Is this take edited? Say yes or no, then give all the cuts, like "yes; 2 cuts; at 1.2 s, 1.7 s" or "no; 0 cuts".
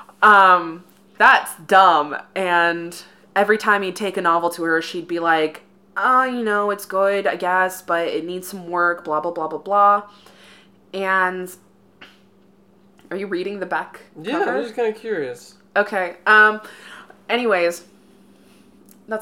yes; 1 cut; at 1.2 s